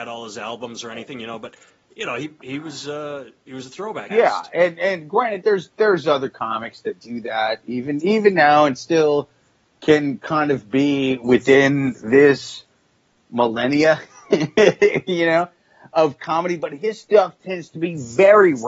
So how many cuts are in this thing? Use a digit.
1